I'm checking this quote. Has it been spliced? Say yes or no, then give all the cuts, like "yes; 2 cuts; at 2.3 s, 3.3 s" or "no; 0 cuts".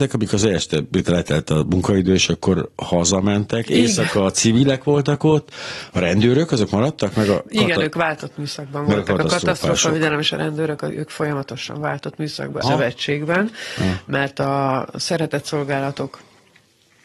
yes; 1 cut; at 12.6 s